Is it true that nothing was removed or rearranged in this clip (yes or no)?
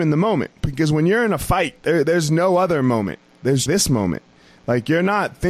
no